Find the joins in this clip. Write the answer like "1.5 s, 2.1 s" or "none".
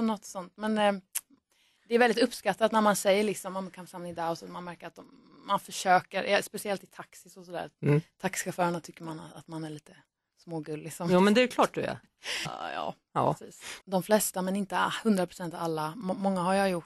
12.5 s, 13.8 s